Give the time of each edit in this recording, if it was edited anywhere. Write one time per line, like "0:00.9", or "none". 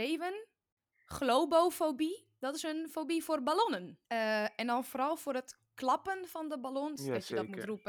0:04.0
0:07.0

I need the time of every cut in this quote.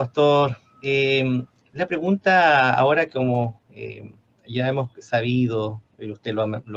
none

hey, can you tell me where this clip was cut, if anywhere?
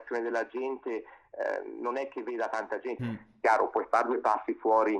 0:03.0

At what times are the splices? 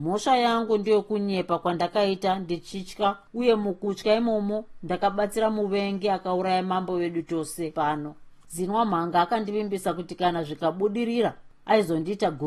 0:03.3

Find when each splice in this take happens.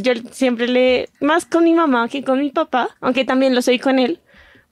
0:01.1
0:03.0

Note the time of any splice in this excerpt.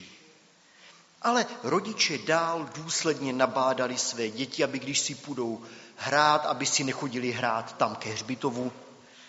none

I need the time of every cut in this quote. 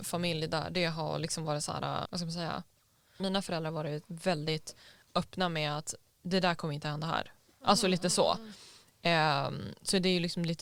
0:02.0
0:03.2

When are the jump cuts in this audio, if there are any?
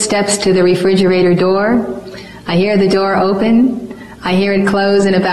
none

